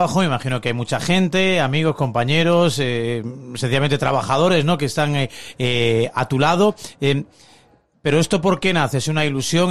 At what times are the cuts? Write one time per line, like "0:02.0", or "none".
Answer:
none